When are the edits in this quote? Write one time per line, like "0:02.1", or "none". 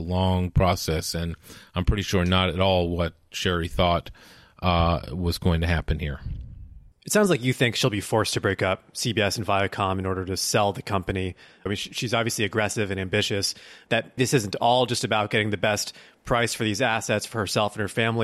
0:11.7
0:14.2